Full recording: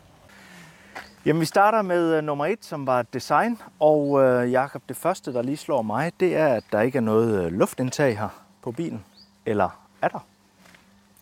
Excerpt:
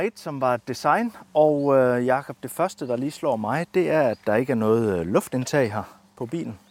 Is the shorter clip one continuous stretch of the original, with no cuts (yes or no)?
yes